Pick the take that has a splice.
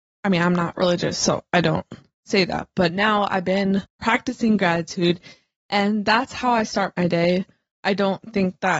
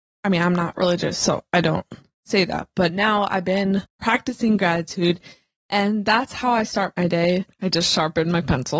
second; 1 cut; at 7.5 s

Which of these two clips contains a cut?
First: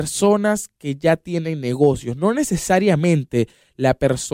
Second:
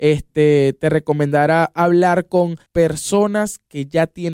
second; 1 cut; at 2.7 s

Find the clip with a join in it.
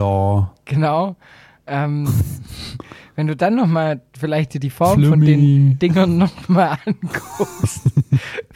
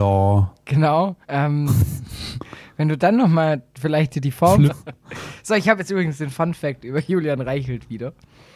second; 2 cuts; at 1.2 s, 4.7 s

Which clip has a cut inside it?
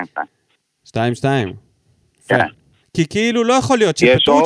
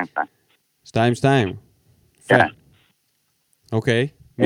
first; 1 cut; at 2.8 s

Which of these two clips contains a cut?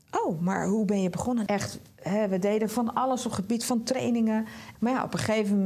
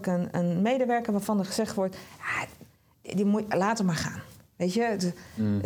first; 2 cuts; at 1.5 s, 4.8 s

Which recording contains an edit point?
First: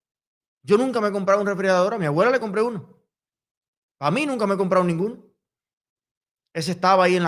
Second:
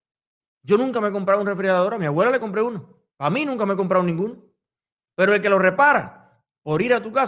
second; 2 cuts; at 3.1 s, 5.0 s

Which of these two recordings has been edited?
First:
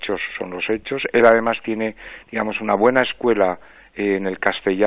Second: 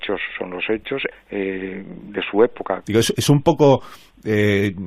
second; 2 cuts; at 1.1 s, 2.8 s

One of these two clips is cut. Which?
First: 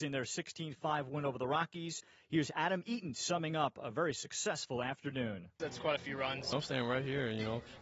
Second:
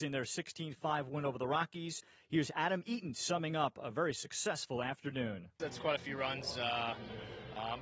first; 1 cut; at 6.5 s

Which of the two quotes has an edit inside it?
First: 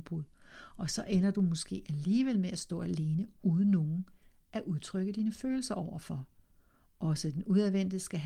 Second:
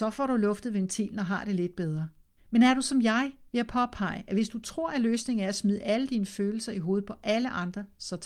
second; 1 cut; at 2.4 s

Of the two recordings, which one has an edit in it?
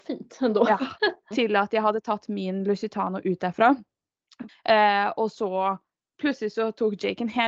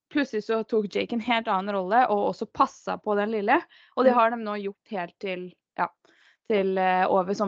first; 2 cuts; at 1.3 s, 4.5 s

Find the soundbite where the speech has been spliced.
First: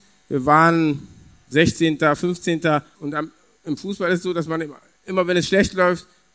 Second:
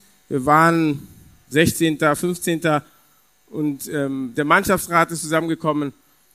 first; 1 cut; at 2.9 s

